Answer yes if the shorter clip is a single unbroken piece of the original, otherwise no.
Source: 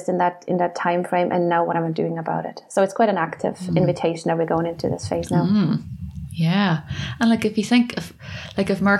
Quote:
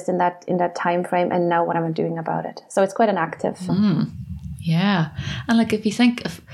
no